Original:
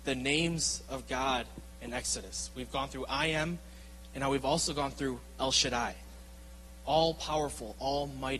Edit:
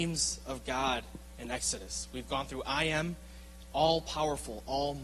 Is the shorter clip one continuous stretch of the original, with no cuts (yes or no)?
no